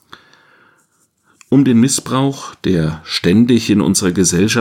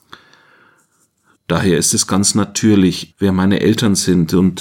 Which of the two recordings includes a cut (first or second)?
second